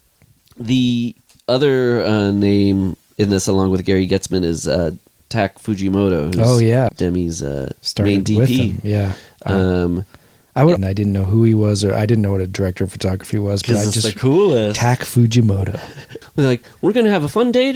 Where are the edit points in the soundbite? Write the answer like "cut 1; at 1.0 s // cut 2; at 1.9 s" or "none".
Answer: cut 1; at 6.9 s // cut 2; at 10.8 s // cut 3; at 16.2 s